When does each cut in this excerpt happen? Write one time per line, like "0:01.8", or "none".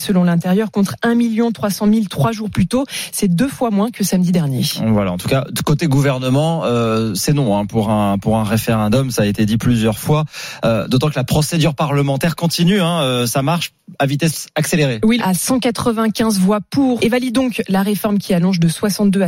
0:15.2
0:17.0